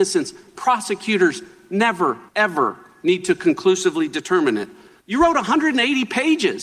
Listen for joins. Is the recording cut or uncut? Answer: cut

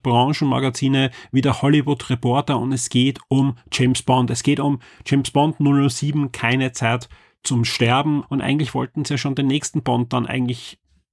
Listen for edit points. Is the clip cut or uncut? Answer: cut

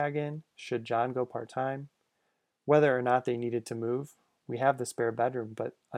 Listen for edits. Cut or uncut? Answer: uncut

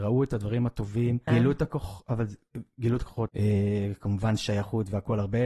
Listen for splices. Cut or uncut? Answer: cut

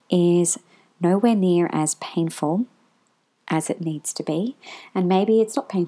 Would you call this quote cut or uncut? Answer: uncut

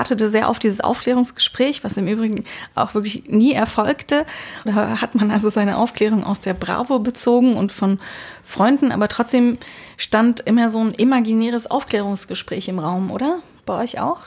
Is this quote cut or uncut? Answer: cut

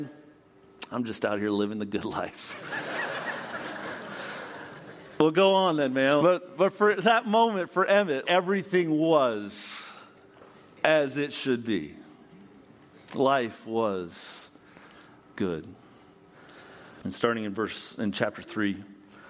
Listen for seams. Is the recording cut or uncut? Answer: cut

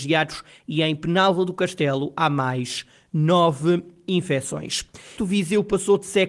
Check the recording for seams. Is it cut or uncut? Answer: cut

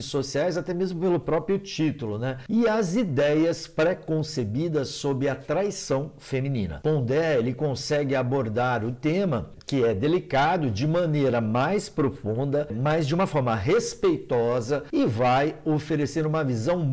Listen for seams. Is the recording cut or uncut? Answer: uncut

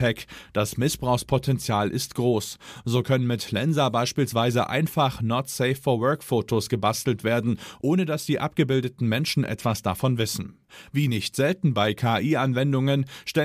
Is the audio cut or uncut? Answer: uncut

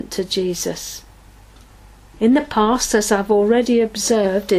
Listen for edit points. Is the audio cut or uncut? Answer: cut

